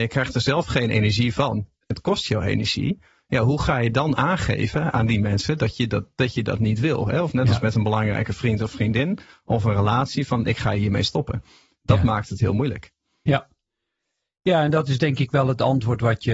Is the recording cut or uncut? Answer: uncut